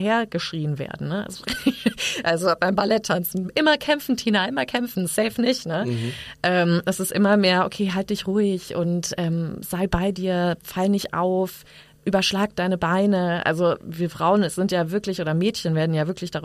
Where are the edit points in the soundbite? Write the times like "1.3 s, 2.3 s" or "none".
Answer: none